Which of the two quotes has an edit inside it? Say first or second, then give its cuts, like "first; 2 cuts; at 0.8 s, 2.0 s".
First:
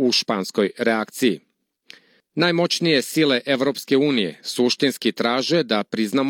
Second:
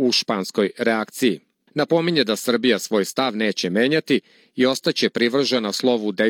second; 1 cut; at 1.7 s